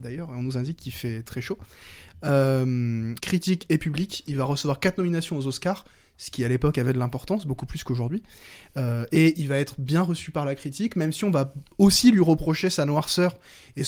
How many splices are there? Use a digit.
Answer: 1